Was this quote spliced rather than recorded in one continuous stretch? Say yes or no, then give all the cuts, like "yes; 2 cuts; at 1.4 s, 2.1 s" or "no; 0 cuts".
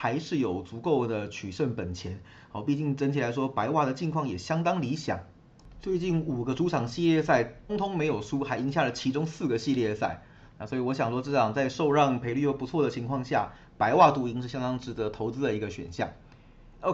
yes; 1 cut; at 7.7 s